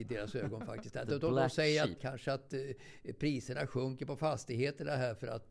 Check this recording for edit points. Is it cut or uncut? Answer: cut